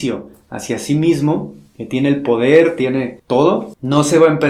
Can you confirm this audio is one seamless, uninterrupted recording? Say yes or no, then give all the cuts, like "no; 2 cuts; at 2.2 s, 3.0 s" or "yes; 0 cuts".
yes; 0 cuts